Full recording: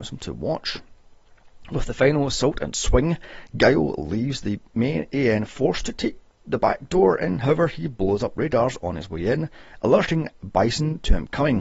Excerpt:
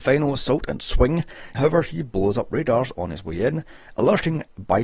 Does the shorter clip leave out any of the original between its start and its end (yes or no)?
yes